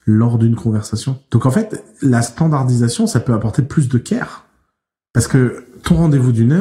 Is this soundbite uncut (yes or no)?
yes